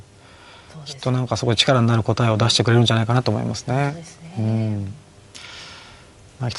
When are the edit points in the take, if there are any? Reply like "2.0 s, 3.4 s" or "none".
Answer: none